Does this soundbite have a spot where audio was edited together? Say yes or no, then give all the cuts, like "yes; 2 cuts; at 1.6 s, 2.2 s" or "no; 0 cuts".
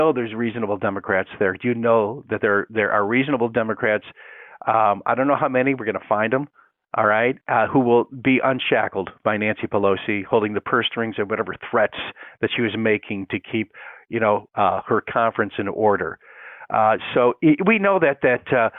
no; 0 cuts